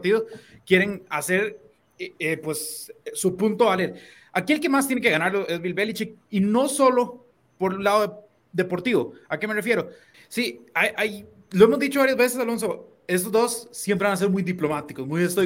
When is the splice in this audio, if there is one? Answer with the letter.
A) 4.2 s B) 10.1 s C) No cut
B